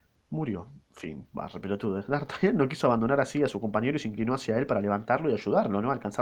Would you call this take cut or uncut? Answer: uncut